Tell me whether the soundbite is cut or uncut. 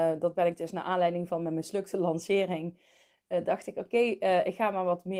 uncut